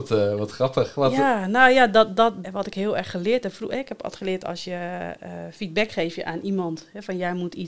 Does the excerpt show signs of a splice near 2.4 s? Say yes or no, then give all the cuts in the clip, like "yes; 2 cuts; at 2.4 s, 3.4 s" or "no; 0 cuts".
yes; 1 cut; at 2.4 s